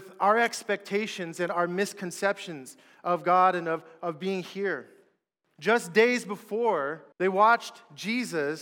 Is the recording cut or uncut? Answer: cut